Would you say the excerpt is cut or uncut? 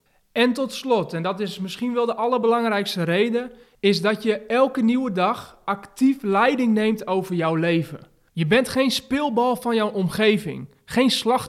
uncut